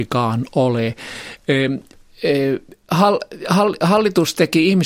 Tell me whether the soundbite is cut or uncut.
uncut